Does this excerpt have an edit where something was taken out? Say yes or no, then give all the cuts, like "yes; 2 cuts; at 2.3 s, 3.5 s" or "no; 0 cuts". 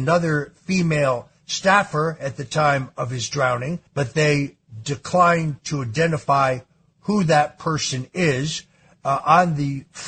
yes; 1 cut; at 3.9 s